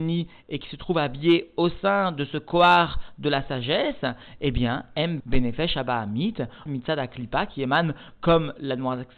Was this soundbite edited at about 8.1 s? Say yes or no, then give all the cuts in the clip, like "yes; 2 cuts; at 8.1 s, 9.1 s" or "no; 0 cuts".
no; 2 cuts; at 5.2 s, 6.7 s